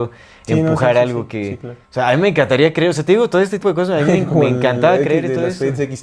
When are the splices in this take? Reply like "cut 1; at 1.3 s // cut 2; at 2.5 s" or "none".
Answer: cut 1; at 1.8 s // cut 2; at 3.6 s